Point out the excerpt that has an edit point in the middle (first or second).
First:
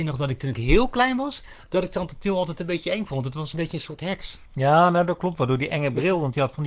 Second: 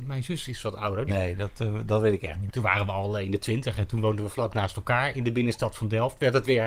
second